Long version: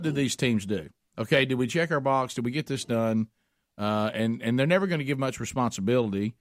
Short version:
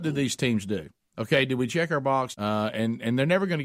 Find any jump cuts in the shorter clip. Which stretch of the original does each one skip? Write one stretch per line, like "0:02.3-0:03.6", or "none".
0:02.3-0:03.7